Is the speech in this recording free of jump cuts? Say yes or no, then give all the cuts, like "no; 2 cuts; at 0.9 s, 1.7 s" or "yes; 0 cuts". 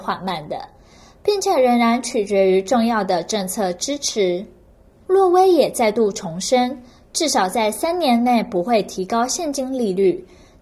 yes; 0 cuts